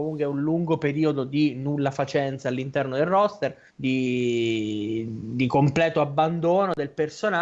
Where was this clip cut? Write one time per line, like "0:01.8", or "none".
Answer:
0:03.7